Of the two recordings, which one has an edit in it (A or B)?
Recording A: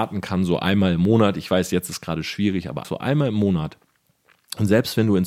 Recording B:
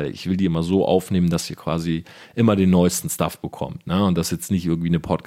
A